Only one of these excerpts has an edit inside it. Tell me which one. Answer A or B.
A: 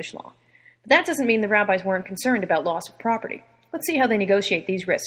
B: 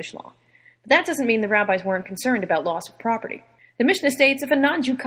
B